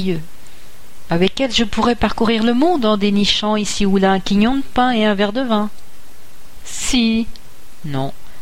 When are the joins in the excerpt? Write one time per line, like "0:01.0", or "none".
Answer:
0:06.6